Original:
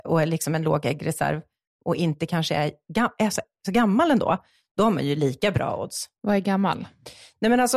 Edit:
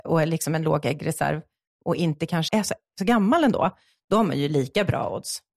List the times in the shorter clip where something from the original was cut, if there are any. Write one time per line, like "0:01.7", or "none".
0:02.5